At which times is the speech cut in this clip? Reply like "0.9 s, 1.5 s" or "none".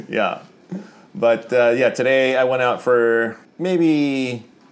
none